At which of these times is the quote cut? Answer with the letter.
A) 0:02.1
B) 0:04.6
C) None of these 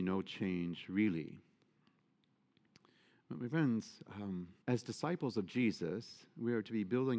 B